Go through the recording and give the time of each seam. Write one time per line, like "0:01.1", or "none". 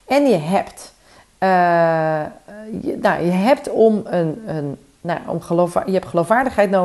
none